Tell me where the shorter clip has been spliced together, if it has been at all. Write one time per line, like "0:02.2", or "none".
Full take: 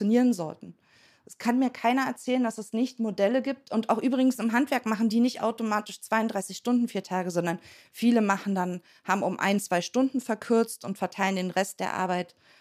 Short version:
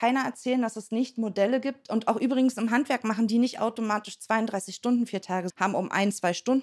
0:05.5